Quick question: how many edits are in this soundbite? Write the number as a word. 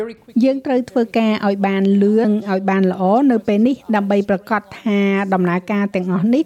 one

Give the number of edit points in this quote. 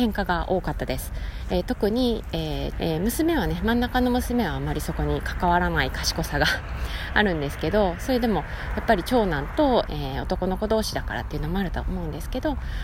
two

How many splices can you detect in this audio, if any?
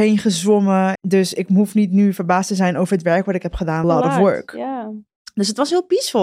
two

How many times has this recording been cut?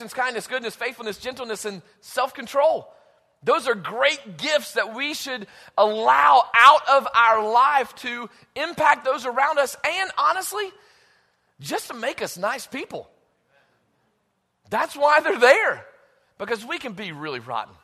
zero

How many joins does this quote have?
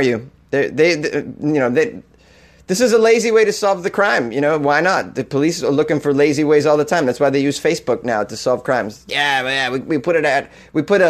one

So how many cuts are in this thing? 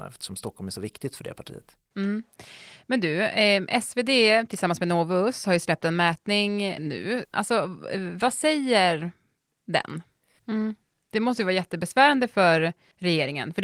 two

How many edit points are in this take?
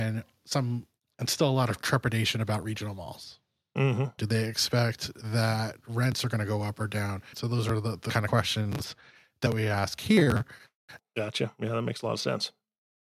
three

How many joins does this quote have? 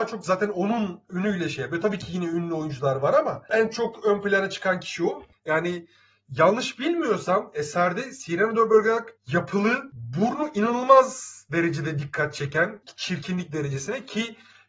two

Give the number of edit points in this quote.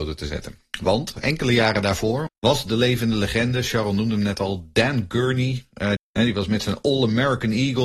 two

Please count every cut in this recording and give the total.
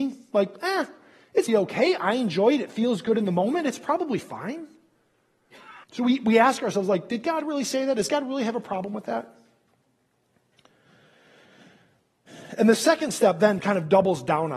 two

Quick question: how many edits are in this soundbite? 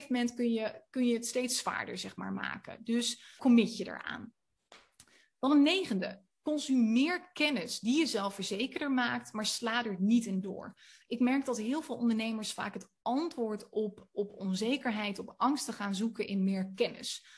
one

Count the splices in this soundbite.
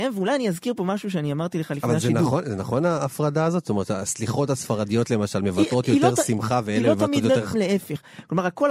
one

